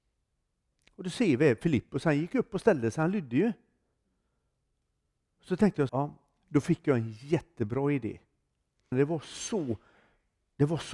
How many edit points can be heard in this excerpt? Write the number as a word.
two